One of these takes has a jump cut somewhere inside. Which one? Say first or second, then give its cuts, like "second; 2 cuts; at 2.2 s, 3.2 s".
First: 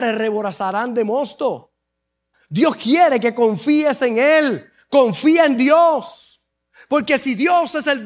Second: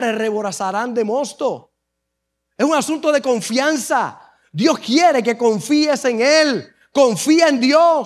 first; 1 cut; at 2.3 s